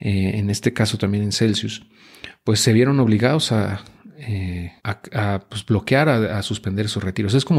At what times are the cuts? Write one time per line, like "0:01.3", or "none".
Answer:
0:04.8